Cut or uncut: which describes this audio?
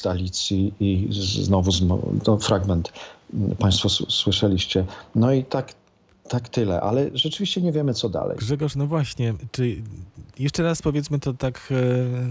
cut